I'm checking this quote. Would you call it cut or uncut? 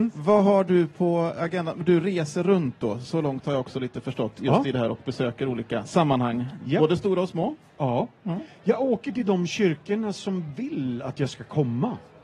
uncut